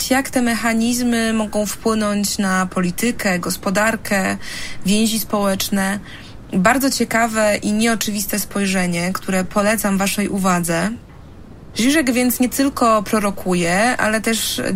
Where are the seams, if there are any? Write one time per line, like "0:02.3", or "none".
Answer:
0:11.7

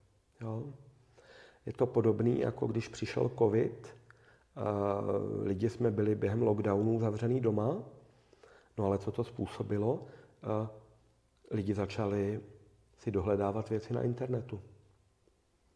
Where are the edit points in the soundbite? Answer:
none

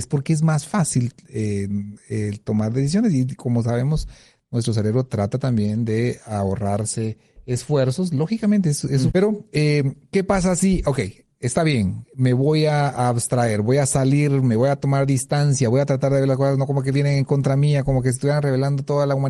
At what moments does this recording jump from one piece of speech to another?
0:09.1

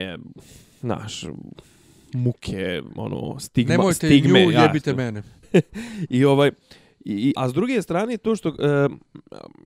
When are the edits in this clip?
0:05.4
0:07.4

